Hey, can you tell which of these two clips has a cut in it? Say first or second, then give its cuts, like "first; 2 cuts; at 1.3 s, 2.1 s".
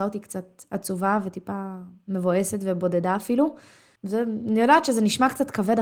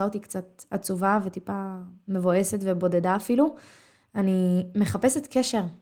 first; 1 cut; at 4.0 s